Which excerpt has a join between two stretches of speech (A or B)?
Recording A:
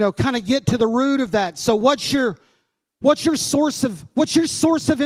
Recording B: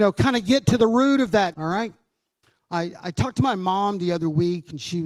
B